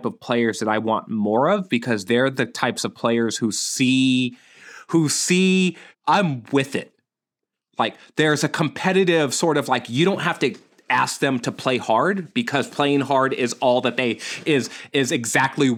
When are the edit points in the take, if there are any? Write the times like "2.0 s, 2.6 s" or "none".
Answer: 5.9 s